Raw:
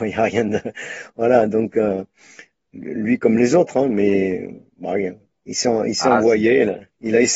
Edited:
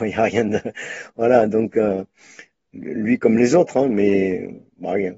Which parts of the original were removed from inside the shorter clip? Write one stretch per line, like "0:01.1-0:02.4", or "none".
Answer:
none